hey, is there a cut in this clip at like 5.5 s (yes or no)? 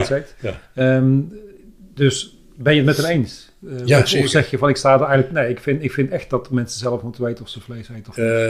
no